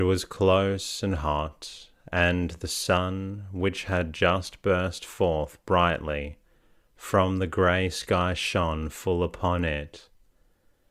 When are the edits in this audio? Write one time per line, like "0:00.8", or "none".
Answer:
none